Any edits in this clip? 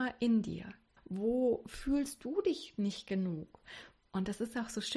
yes; 2 cuts; at 1.0 s, 4.0 s

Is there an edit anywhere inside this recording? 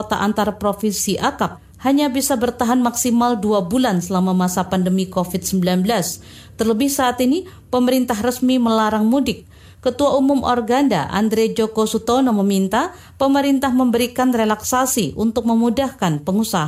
no; 0 cuts

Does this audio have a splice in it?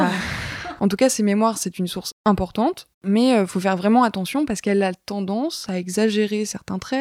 yes; 1 cut; at 2.9 s

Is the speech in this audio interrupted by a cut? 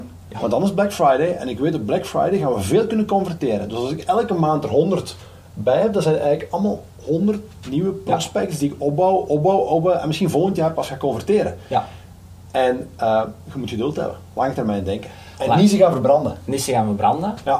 no; 0 cuts

